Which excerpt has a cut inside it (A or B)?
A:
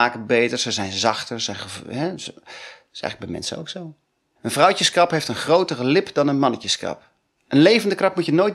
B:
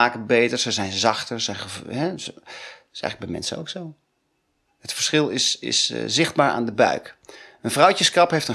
A